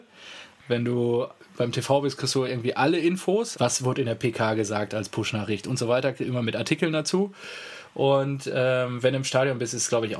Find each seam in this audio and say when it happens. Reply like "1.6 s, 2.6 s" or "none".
3.5 s